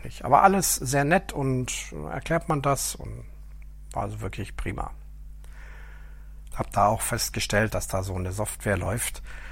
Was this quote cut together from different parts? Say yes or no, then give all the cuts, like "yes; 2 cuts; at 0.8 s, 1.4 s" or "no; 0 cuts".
yes; 2 cuts; at 6.5 s, 7.7 s